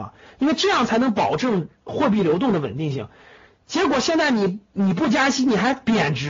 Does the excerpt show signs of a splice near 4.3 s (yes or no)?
no